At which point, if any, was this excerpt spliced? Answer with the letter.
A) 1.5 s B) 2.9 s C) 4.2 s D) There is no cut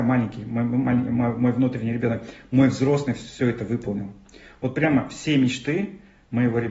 D